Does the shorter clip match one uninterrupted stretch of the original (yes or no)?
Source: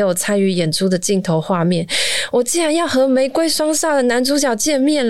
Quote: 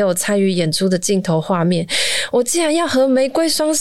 yes